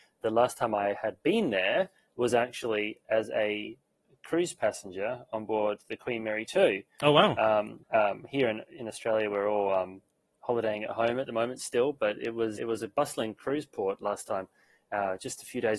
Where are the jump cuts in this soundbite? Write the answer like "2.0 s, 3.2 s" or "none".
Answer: 7.8 s, 12.6 s